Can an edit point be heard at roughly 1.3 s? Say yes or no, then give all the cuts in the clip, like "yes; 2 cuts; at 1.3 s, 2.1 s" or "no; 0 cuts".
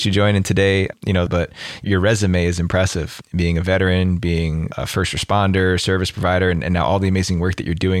yes; 1 cut; at 1.3 s